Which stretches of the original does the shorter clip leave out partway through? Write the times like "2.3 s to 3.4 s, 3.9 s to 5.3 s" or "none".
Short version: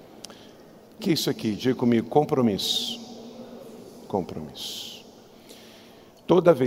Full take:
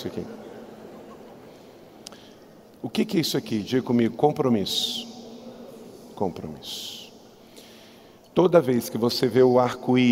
2.8 s to 3.1 s

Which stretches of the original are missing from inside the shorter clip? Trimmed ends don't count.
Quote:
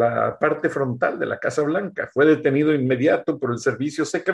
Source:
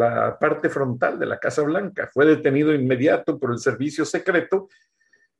none

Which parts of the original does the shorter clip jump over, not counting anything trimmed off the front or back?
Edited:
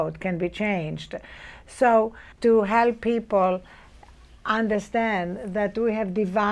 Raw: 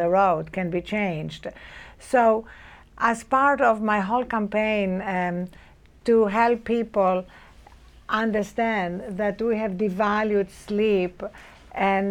2.6 s to 6.0 s

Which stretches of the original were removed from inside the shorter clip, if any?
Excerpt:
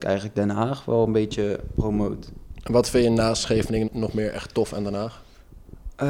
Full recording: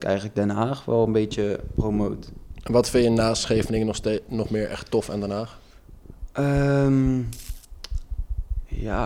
3.9 s to 4.2 s

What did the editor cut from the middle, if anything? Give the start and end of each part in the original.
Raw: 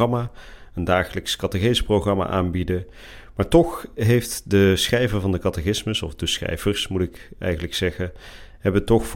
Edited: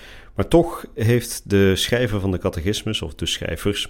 none

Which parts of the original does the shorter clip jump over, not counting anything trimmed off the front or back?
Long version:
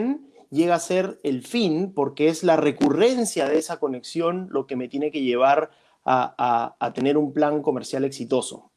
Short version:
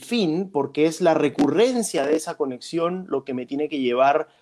none

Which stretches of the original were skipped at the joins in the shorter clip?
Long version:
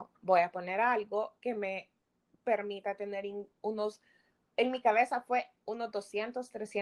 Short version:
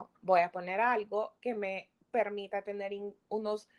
2.0 s to 2.3 s

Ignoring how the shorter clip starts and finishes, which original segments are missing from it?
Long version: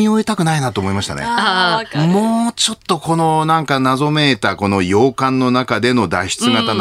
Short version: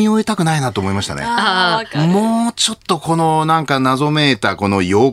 none

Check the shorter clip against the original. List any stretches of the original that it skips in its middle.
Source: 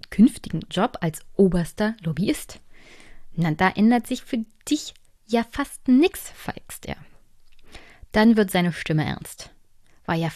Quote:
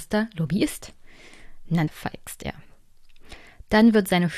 3.5 s to 6.3 s

